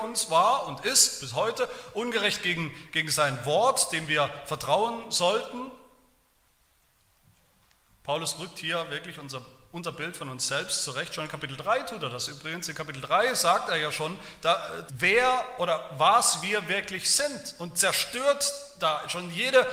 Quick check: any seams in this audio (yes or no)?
yes